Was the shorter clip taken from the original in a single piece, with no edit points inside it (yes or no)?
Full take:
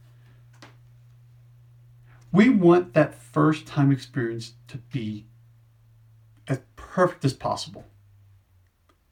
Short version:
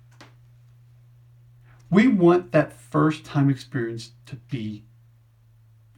yes